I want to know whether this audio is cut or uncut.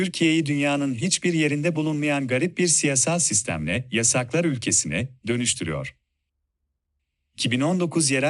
uncut